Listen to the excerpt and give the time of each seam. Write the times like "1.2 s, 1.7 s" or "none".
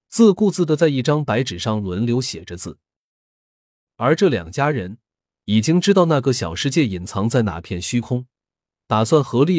3.9 s